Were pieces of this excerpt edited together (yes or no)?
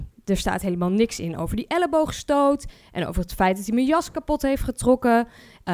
no